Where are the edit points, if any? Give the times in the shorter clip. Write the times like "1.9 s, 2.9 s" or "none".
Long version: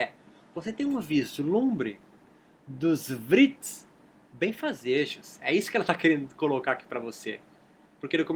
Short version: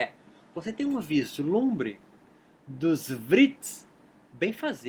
none

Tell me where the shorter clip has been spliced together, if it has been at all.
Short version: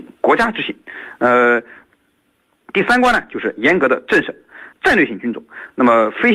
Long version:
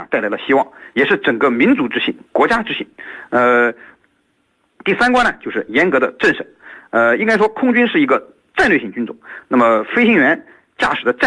4.7 s

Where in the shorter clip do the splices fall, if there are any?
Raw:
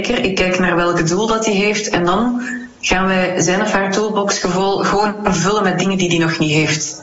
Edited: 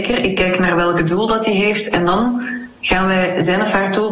none

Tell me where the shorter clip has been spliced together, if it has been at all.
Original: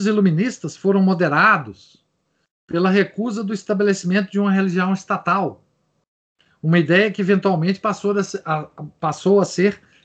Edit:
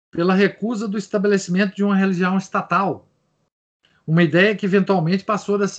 none

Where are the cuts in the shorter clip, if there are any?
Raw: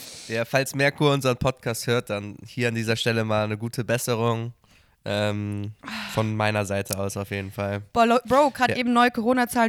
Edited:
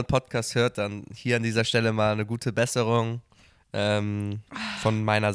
none

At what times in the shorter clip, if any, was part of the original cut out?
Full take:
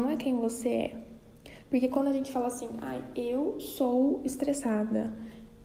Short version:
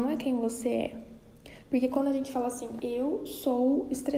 2.8 s

